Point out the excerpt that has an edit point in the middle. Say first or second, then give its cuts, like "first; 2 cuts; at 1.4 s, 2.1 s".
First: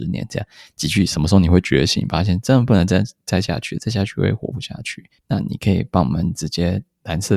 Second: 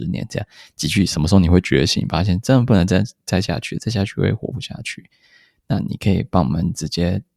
first; 1 cut; at 5.2 s